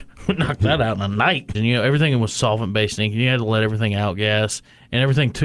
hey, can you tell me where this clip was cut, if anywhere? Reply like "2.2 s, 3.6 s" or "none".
1.5 s